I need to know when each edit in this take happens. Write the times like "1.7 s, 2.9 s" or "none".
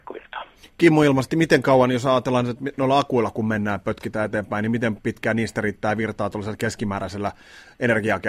none